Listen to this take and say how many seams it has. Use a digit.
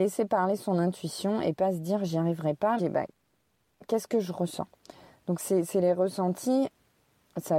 1